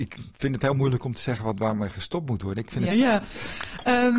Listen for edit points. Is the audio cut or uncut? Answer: cut